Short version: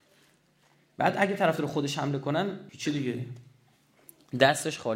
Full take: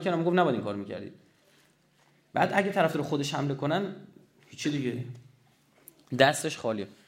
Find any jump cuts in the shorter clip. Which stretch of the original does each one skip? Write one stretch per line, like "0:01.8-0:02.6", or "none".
0:04.0-0:04.5

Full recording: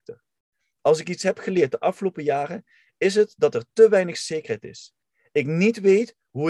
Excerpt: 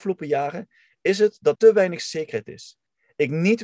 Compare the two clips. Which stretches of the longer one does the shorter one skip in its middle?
0:03.5-0:03.7

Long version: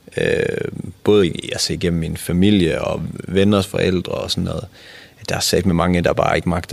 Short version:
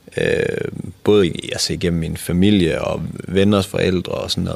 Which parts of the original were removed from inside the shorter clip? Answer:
none

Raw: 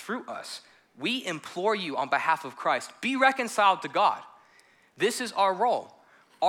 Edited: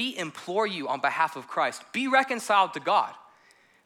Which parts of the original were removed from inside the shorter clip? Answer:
none

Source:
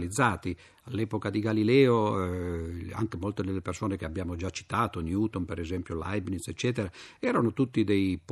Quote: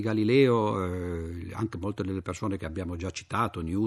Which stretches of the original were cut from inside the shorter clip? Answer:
none

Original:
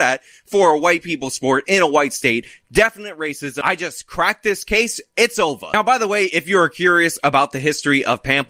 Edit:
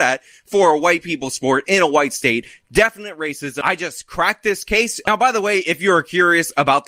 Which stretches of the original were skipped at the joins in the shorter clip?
0:05.0-0:05.7

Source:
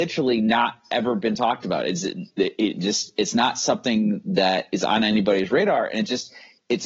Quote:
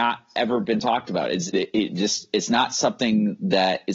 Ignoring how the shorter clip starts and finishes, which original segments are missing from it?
0:02.0-0:02.3

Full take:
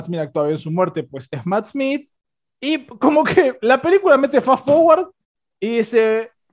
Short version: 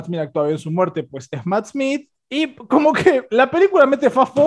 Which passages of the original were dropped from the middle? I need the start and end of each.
0:02.2-0:02.5

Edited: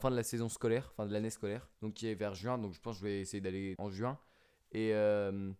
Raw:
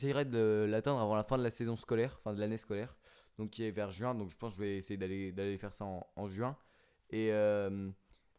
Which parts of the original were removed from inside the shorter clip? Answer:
0:03.0-0:03.3
0:05.3-0:06.1

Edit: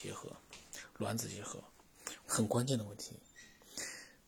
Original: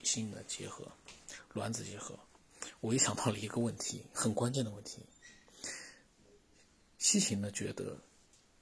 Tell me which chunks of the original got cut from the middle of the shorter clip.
0:02.8-0:04.1

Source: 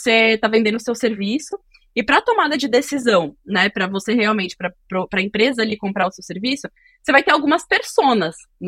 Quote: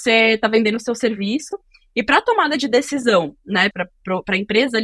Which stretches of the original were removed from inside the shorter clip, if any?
0:03.7-0:04.6

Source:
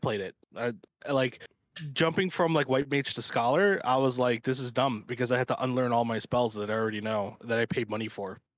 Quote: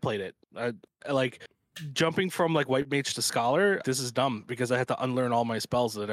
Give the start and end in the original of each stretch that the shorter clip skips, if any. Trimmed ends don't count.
0:03.8-0:04.4

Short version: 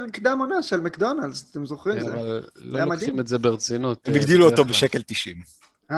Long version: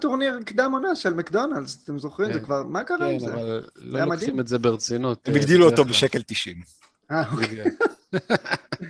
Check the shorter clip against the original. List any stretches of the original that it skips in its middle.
0:02.3-0:03.2

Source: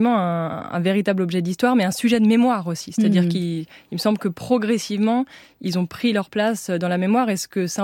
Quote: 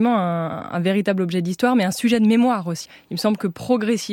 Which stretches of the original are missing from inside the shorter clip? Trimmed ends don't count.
0:02.9-0:03.7

